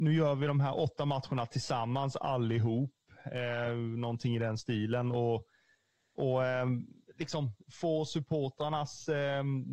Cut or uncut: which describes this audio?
uncut